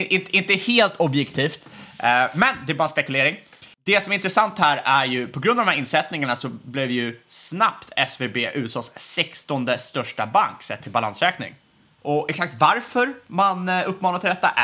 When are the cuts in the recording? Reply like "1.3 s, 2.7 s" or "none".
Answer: 3.7 s, 12.0 s